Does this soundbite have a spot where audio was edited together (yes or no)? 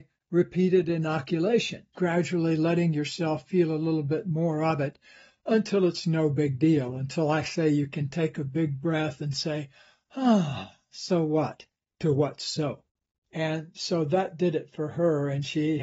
yes